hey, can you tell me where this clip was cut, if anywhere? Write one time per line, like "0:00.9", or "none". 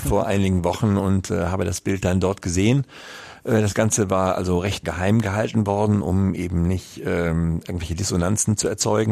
0:04.8